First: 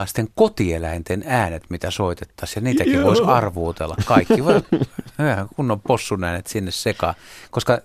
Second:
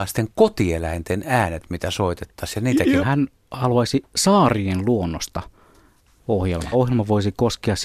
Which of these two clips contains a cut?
second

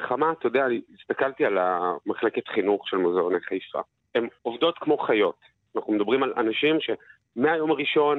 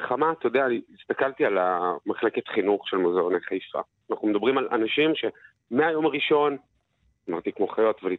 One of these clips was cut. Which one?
second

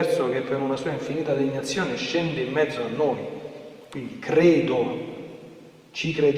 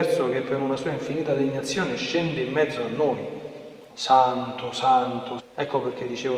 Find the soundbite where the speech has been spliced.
second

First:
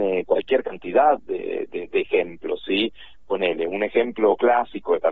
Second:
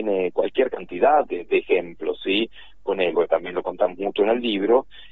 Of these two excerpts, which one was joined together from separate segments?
second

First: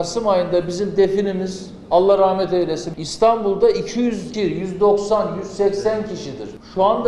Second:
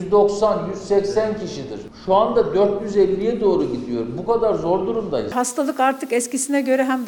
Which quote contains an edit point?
first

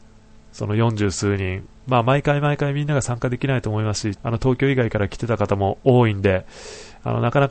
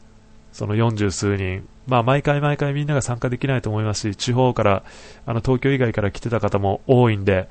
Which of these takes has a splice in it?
first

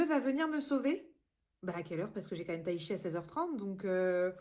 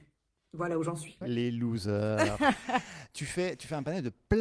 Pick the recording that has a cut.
second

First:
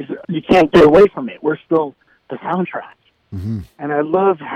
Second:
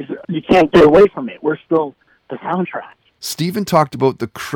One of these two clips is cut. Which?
second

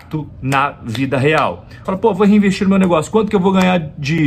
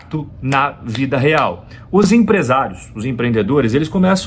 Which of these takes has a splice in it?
first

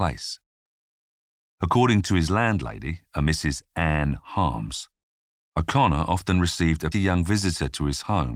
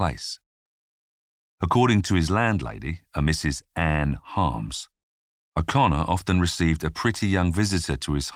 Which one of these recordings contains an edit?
first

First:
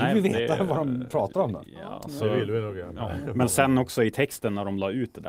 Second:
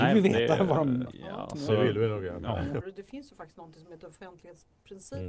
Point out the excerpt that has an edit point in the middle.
second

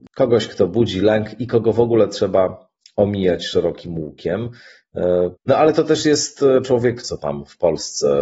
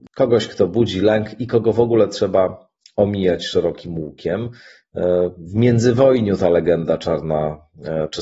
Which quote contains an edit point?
first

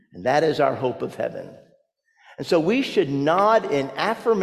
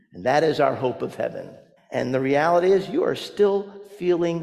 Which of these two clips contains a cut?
second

